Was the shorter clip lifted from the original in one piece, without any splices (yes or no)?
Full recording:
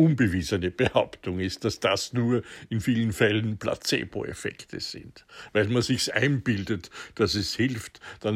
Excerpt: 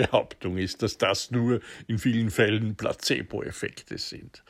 yes